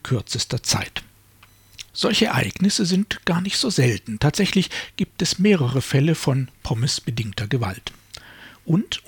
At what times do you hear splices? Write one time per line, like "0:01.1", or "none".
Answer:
0:01.9